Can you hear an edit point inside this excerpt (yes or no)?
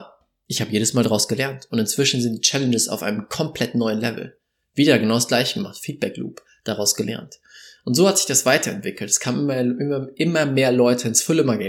no